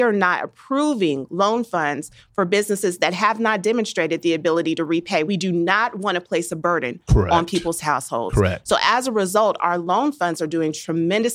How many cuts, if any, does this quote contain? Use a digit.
0